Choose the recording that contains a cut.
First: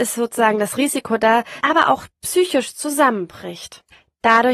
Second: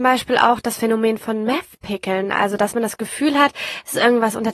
first; 1 cut; at 1.6 s

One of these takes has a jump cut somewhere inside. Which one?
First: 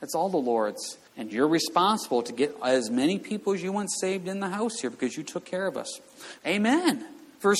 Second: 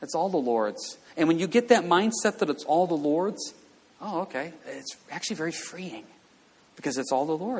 first; 2 cuts; at 1.1 s, 6.4 s

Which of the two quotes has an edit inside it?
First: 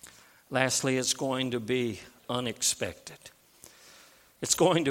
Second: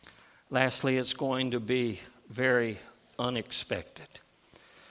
first; 1 cut; at 2.2 s

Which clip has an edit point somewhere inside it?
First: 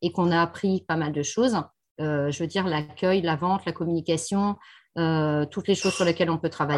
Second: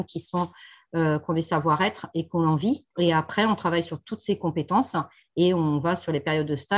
second; 1 cut; at 2.9 s

